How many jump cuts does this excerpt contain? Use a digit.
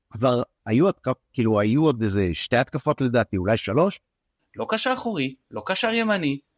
1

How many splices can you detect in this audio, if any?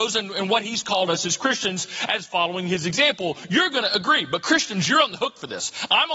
0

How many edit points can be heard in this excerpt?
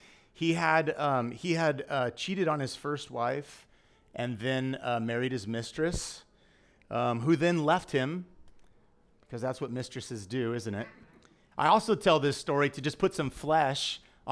1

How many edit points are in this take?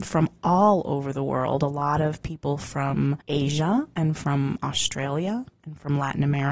1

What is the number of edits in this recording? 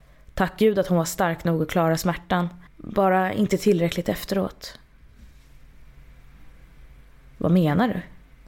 1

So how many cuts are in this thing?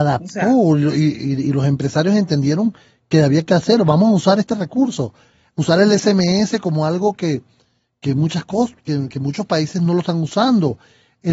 1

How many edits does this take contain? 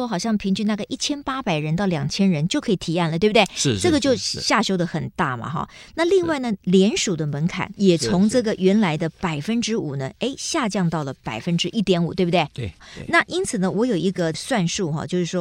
0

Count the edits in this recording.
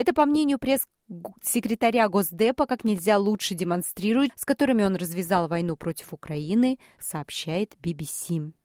2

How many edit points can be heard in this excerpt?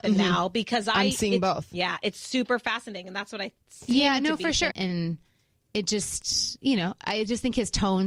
1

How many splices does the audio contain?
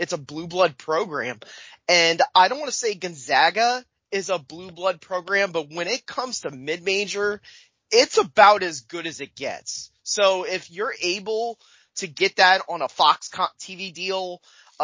0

